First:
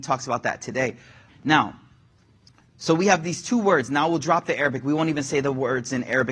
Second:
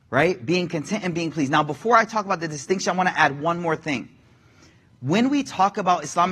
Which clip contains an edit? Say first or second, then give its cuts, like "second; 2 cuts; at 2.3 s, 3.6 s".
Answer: first; 1 cut; at 1.3 s